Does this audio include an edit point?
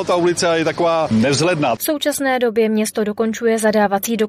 yes; 1 cut; at 1.8 s

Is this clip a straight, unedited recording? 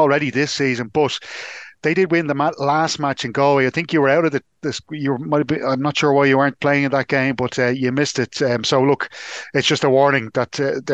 yes; 0 cuts

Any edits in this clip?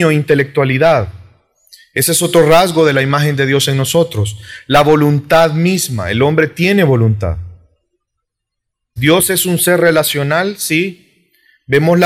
yes; 1 cut; at 9.0 s

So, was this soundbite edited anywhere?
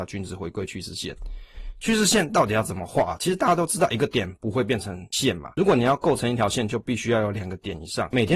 no; 0 cuts

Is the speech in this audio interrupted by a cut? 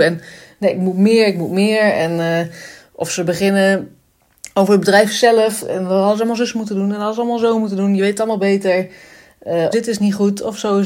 yes; 2 cuts; at 5.6 s, 9.7 s

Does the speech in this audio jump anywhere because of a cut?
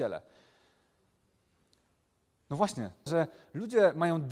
yes; 1 cut; at 3.1 s

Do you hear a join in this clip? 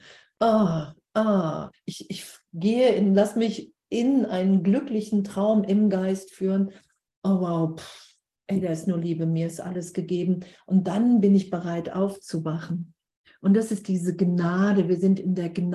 yes; 1 cut; at 1.7 s

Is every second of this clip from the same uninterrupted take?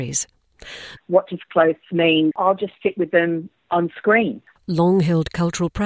no; 2 cuts; at 1.0 s, 2.3 s

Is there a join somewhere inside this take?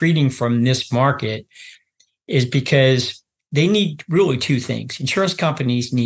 no; 0 cuts

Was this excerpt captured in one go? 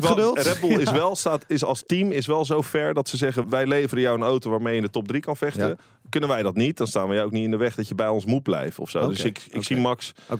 no; 1 cut; at 3.4 s

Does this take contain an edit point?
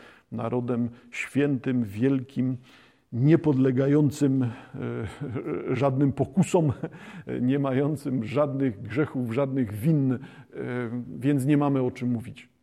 no; 0 cuts

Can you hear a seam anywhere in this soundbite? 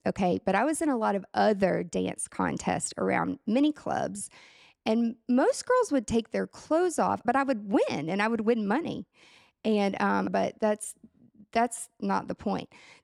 yes; 2 cuts; at 7.2 s, 10.3 s

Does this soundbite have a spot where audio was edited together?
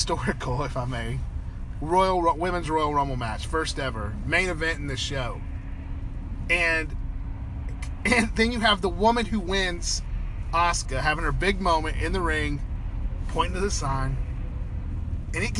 no; 0 cuts

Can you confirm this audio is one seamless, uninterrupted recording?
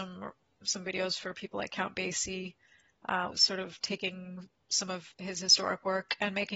no; 2 cuts; at 3.3 s, 5.1 s

